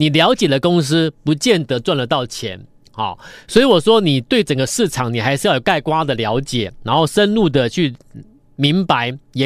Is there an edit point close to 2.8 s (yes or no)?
no